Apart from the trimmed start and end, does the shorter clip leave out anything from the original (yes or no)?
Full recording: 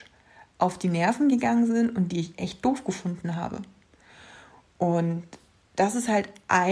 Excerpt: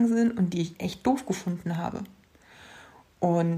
no